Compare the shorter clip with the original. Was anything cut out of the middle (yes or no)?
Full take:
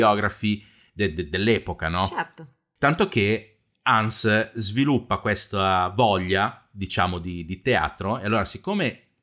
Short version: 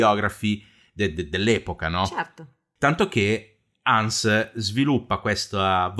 no